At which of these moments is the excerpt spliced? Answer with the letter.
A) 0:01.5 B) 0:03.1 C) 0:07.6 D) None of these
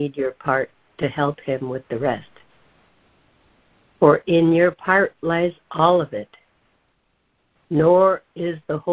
C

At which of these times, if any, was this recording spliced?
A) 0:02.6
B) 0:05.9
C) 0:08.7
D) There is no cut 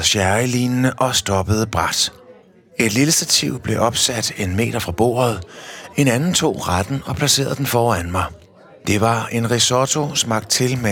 B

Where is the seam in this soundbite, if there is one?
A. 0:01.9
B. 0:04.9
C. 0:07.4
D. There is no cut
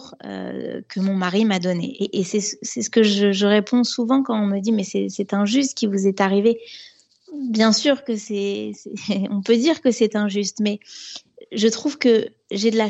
A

